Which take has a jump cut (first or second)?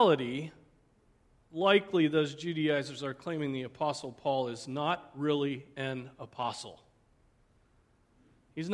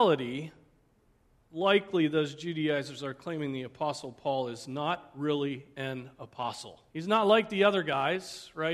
second